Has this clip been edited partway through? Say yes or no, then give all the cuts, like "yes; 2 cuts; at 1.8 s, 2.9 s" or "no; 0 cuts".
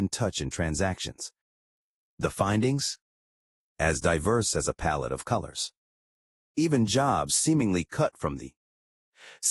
no; 0 cuts